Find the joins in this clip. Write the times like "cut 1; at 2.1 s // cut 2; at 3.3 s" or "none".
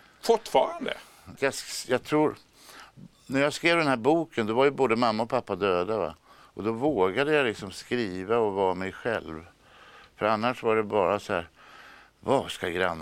cut 1; at 1.3 s